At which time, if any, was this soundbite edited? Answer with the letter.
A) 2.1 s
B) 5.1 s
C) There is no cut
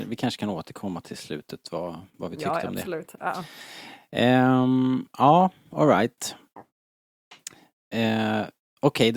C